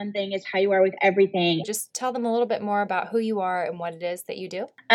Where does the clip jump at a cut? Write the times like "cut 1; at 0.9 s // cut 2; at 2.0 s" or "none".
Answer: cut 1; at 1.6 s